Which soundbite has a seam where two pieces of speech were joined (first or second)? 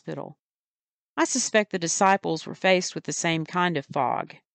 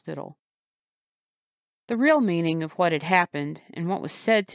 first